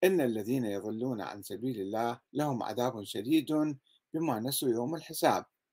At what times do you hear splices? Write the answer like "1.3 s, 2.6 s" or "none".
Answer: 2.3 s